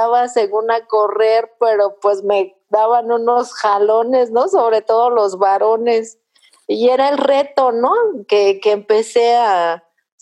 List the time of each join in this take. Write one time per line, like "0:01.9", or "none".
none